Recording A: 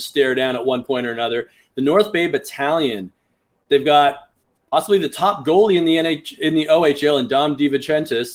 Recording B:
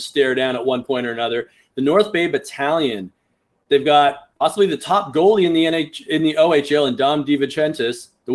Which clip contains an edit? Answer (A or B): B